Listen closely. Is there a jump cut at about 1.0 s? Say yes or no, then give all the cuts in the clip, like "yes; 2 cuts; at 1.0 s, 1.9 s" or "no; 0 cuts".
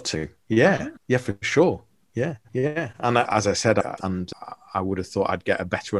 yes; 2 cuts; at 1.0 s, 4.0 s